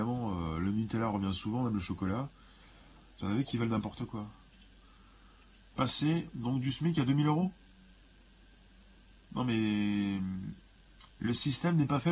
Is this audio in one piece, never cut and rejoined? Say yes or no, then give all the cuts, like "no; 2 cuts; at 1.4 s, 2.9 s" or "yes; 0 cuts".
no; 1 cut; at 11.1 s